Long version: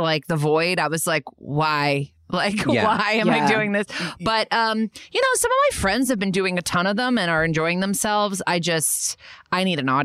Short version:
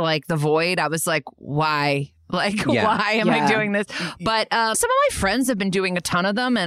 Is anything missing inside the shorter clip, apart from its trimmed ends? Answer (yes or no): yes